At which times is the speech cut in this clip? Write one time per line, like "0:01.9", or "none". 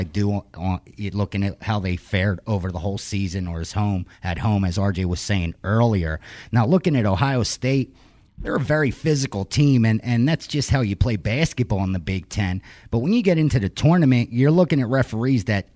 none